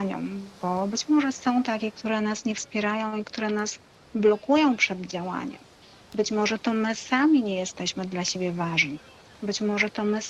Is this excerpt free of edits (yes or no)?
yes